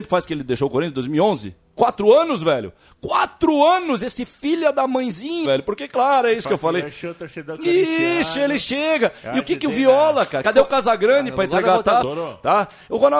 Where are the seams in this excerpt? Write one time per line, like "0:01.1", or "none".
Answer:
0:05.4
0:10.4
0:12.0